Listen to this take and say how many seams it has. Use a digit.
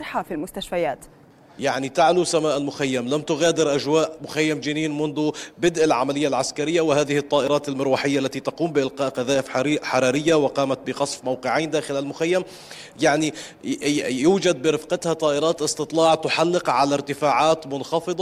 1